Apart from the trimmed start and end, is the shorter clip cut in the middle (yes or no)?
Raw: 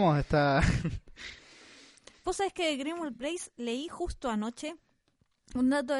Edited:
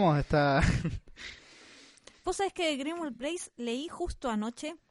no